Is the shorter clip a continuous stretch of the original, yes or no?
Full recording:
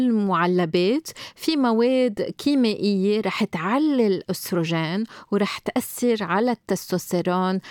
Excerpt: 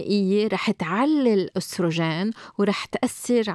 yes